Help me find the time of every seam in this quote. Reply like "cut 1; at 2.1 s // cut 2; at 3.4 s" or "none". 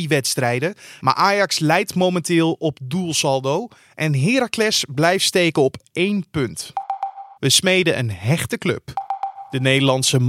cut 1; at 1.0 s // cut 2; at 7.4 s